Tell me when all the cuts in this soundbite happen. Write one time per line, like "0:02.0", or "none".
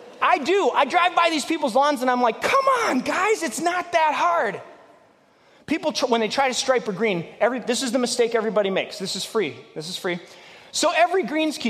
0:10.7